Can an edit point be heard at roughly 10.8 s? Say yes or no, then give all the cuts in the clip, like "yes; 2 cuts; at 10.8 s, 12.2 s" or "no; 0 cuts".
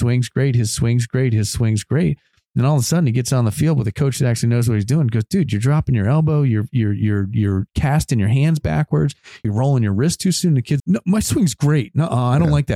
yes; 2 cuts; at 9.4 s, 10.8 s